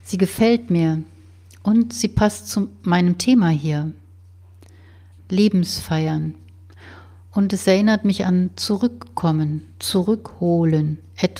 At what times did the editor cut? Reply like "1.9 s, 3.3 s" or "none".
5.2 s